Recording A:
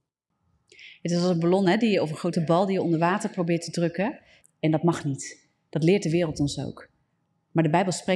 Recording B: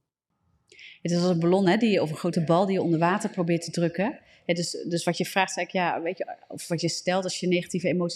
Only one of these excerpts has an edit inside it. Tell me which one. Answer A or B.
A